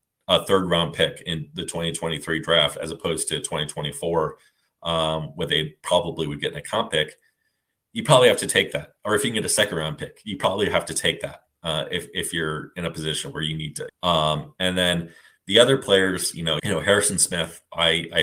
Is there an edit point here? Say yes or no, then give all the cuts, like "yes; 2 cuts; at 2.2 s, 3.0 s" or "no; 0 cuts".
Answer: yes; 2 cuts; at 13.9 s, 16.6 s